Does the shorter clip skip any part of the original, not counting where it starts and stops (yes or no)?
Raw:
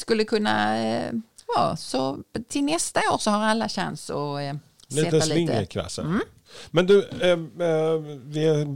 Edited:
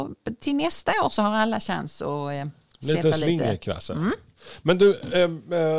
no